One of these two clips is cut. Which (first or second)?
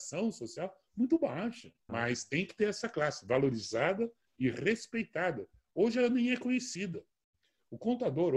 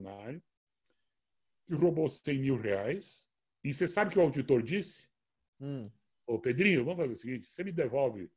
first